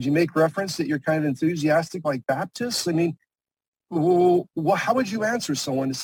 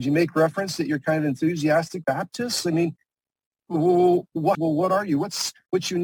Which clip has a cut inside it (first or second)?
second